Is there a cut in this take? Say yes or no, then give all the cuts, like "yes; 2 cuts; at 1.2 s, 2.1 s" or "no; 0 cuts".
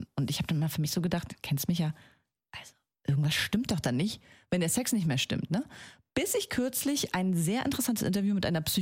no; 0 cuts